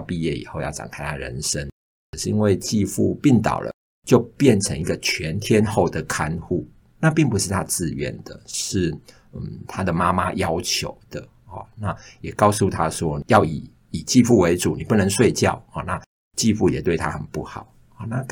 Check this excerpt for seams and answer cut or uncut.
uncut